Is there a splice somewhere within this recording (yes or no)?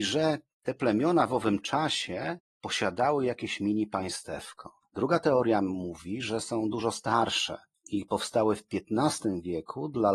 no